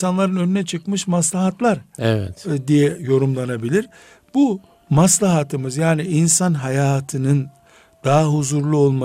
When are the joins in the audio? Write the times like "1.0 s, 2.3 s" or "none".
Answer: none